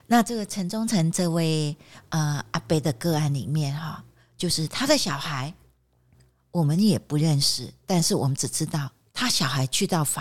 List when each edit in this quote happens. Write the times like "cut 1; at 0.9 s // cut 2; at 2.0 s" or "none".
none